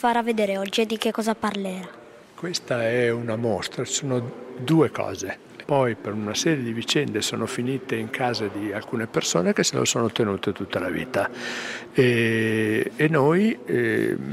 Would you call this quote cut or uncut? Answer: cut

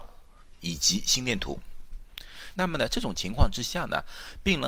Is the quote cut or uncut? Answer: cut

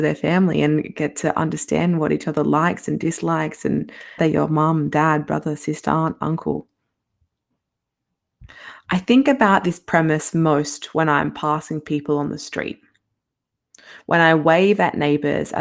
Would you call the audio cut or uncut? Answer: cut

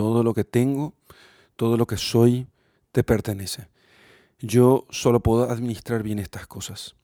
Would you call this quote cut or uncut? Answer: uncut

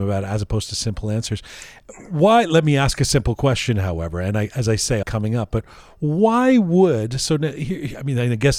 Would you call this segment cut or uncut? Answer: cut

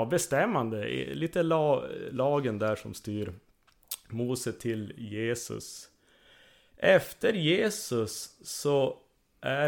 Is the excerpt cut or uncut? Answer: uncut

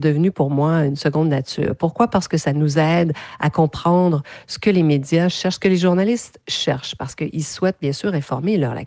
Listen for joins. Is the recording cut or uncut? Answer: uncut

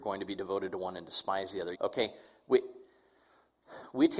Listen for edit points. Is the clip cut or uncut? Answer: cut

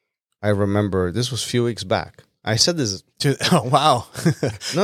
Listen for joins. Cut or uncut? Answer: uncut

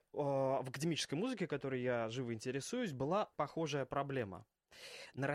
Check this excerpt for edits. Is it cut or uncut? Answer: cut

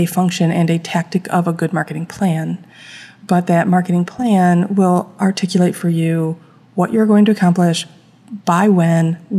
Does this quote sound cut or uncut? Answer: uncut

